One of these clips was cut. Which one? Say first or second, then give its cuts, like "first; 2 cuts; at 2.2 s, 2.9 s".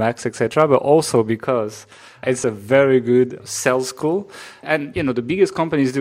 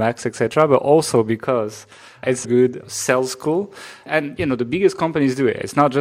second; 1 cut; at 2.4 s